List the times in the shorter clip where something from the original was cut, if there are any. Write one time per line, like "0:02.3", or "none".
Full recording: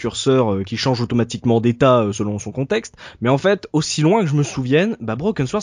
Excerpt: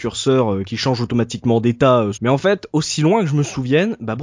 0:02.1